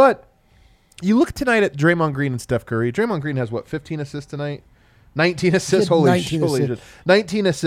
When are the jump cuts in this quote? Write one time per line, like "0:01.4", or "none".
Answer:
none